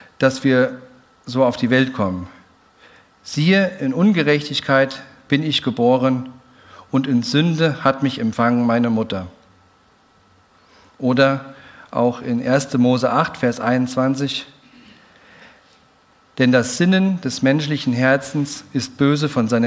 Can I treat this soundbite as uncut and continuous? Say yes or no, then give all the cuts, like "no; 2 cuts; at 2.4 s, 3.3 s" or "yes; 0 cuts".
yes; 0 cuts